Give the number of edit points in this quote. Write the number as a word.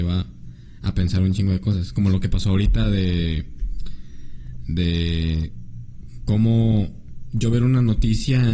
zero